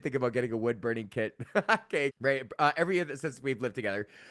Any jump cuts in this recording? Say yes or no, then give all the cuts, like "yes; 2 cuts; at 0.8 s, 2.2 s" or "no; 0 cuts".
yes; 1 cut; at 2.1 s